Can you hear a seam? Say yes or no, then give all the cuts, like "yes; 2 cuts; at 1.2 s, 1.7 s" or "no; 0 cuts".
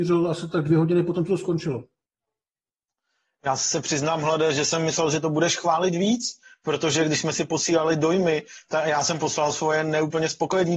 no; 0 cuts